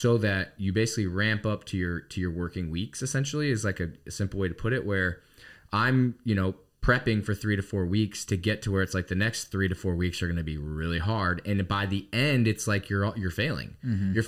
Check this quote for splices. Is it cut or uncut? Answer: uncut